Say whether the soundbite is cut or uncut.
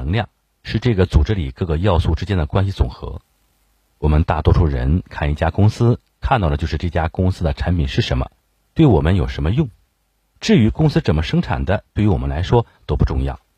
uncut